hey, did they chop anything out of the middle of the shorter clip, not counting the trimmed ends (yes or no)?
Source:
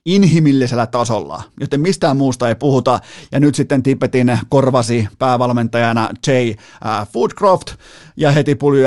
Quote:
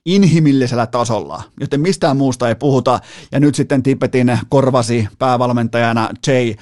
no